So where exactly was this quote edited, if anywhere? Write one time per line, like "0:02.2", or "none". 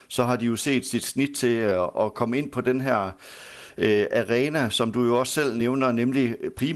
none